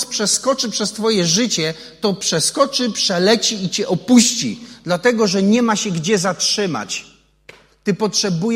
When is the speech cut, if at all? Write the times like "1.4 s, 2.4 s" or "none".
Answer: none